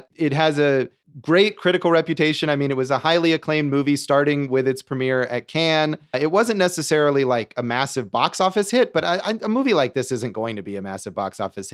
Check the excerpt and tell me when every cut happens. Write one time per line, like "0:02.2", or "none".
none